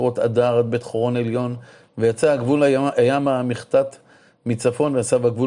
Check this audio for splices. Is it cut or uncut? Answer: uncut